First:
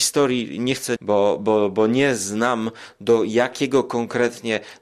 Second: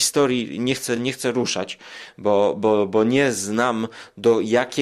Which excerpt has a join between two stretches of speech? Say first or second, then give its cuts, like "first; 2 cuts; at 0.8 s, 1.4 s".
first; 1 cut; at 1.0 s